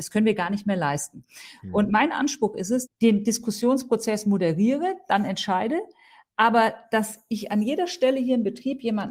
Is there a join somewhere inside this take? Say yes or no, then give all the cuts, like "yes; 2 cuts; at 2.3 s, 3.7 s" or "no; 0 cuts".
yes; 1 cut; at 2.9 s